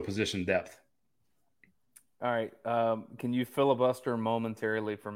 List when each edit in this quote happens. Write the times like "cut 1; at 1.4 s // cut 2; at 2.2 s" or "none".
none